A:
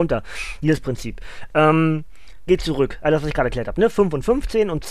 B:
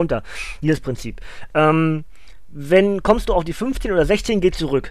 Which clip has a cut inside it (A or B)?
A